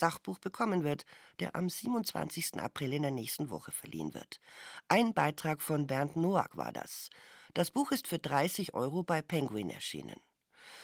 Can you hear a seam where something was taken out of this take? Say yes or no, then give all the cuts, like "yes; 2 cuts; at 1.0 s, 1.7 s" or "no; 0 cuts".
no; 0 cuts